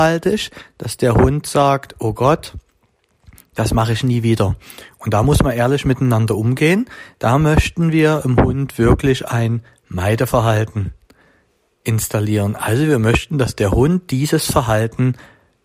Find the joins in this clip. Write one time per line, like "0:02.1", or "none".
none